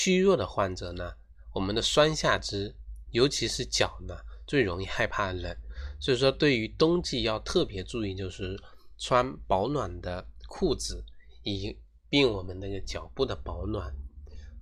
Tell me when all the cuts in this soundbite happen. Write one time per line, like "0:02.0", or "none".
none